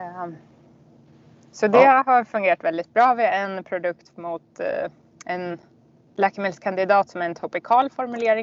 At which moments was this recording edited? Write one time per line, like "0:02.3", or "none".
none